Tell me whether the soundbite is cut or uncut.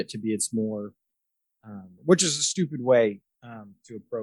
cut